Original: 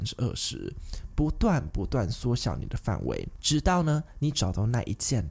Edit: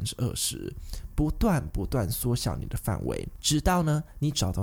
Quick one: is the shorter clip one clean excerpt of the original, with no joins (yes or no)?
yes